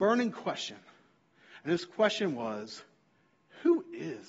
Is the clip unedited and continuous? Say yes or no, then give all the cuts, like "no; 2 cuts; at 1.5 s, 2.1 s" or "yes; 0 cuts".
yes; 0 cuts